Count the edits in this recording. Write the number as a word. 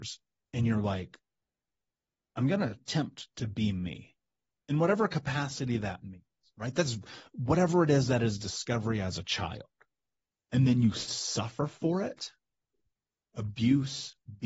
zero